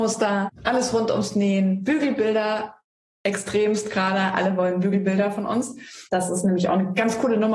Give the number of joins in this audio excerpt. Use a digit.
0